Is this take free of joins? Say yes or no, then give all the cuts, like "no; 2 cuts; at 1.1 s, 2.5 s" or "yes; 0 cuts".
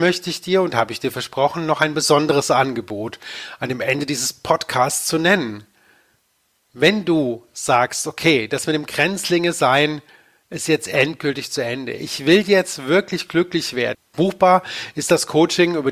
no; 1 cut; at 13.9 s